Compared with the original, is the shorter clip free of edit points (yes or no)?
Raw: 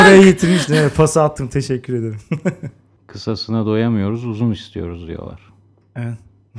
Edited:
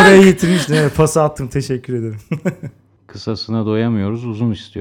yes